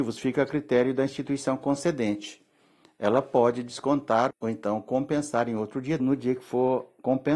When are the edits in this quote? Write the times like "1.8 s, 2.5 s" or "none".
4.3 s, 6.0 s